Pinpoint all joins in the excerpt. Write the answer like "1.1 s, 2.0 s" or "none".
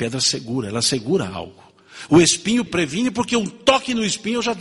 2.7 s